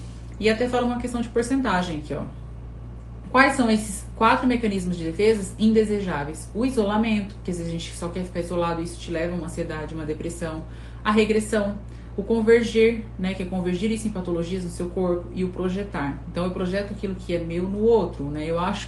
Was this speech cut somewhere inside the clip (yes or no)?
no